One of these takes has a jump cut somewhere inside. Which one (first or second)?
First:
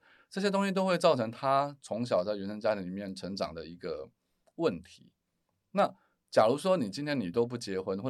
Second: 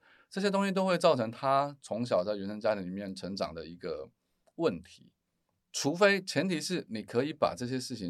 second